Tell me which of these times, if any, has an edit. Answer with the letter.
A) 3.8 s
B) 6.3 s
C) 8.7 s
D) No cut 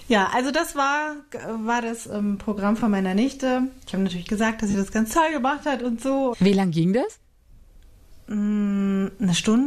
B